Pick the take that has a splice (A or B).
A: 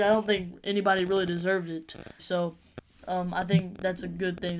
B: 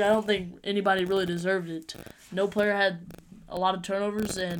A